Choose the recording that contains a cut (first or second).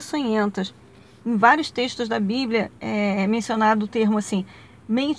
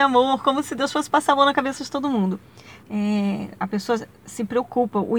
second